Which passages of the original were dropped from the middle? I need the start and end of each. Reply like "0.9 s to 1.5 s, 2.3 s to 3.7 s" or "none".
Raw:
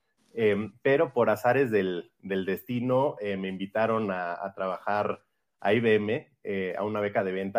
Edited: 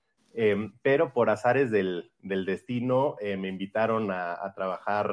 none